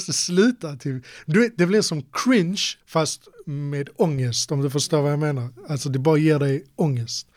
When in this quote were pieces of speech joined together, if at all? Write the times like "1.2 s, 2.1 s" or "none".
2.8 s